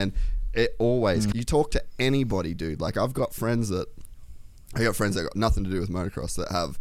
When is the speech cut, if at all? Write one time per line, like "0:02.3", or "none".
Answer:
0:01.3